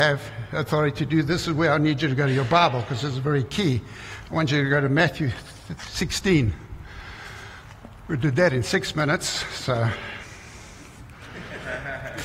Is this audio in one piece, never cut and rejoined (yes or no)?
yes